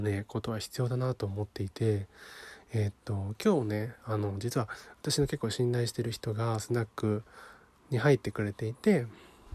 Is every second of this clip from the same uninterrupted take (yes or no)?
yes